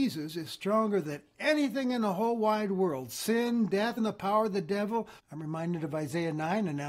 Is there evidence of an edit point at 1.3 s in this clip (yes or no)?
no